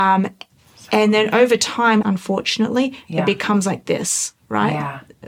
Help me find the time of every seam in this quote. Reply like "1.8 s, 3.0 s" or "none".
2.0 s